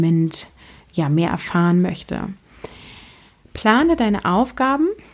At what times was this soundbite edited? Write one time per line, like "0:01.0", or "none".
none